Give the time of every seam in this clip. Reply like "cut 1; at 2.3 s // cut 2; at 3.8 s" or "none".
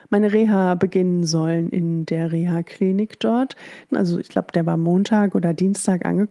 cut 1; at 3.9 s